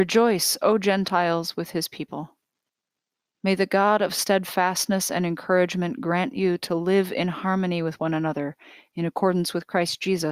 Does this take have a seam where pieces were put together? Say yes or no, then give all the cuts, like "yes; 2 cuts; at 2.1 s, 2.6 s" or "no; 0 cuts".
yes; 1 cut; at 3.3 s